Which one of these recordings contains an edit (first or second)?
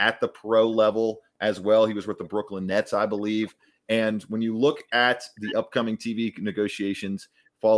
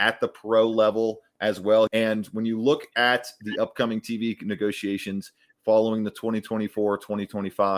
second